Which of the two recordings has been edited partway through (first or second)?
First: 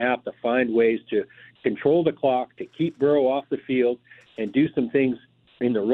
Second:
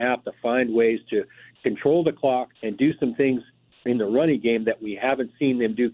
second